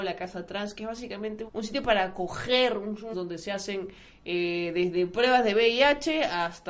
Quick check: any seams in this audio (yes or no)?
yes